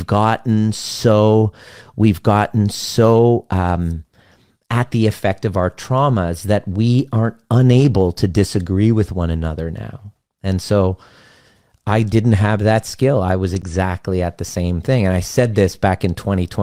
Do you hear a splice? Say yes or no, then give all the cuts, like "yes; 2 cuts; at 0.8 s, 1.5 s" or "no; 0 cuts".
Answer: no; 0 cuts